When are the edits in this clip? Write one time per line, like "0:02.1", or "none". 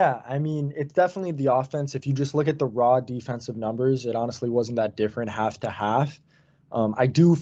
none